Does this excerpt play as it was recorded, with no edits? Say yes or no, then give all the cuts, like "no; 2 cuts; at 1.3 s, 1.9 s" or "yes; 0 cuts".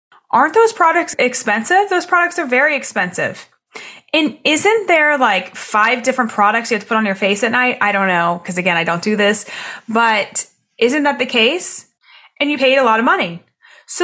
yes; 0 cuts